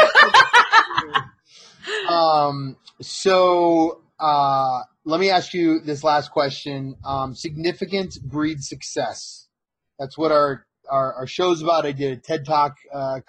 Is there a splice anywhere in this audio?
no; 0 cuts

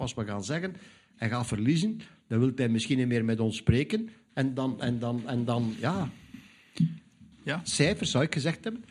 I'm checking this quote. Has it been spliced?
yes; 1 cut; at 7.3 s

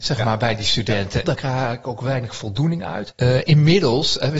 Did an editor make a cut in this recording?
yes; 2 cuts; at 1.2 s, 3.1 s

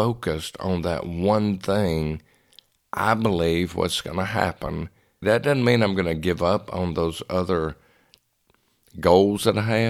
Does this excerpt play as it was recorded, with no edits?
no; 1 cut; at 5.2 s

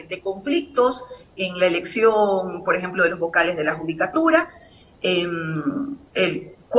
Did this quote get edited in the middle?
no; 0 cuts

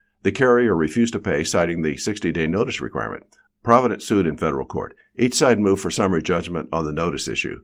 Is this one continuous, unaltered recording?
yes; 0 cuts

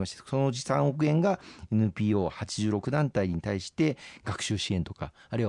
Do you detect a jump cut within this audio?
no; 0 cuts

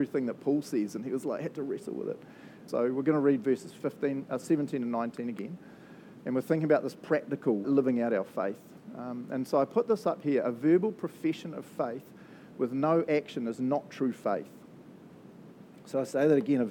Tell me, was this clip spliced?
yes; 2 cuts; at 2.7 s, 7.6 s

